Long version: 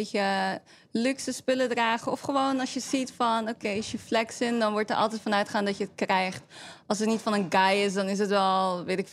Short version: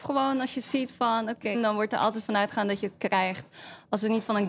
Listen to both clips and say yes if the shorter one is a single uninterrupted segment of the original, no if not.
no